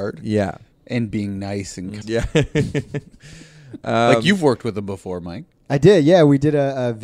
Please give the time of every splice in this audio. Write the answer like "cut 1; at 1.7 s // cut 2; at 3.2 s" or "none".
cut 1; at 2.0 s